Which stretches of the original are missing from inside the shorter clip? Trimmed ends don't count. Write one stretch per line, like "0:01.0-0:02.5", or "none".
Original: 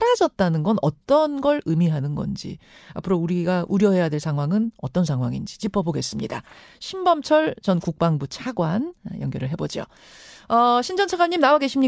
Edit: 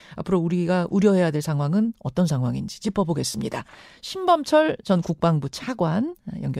none